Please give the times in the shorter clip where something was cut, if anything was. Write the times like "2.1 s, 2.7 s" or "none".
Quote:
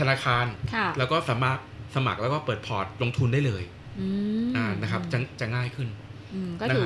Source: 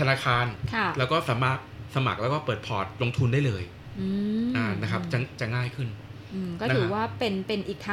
none